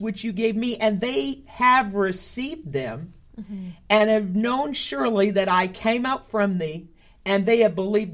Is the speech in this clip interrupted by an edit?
no; 0 cuts

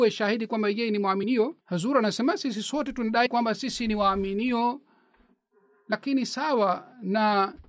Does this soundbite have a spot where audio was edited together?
yes; 1 cut; at 1.6 s

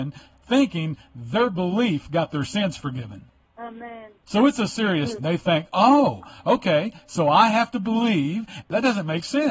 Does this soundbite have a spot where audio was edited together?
yes; 2 cuts; at 5.2 s, 8.6 s

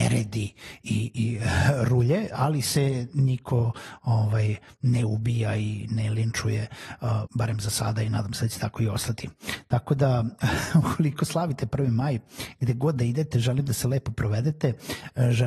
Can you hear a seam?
yes; 1 cut; at 7.3 s

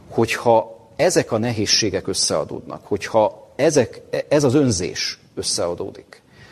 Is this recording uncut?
yes; 0 cuts

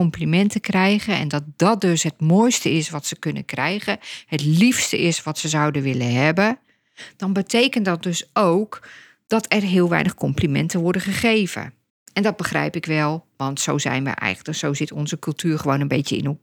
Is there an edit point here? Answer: no; 0 cuts

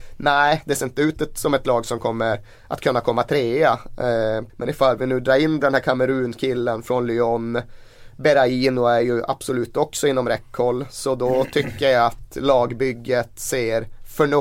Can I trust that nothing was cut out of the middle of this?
no; 1 cut; at 4.5 s

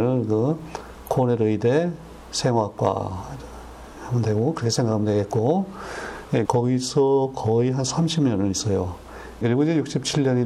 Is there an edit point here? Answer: yes; 2 cuts; at 6.4 s, 9.4 s

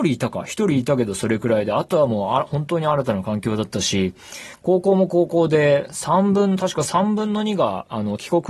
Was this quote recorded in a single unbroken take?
yes; 0 cuts

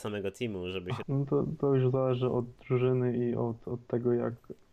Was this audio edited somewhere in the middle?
yes; 1 cut; at 1.0 s

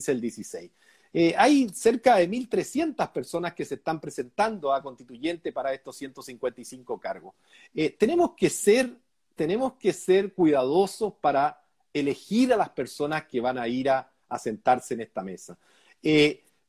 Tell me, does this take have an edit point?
no; 0 cuts

